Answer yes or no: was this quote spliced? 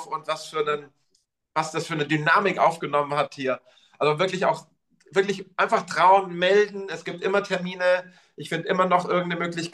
no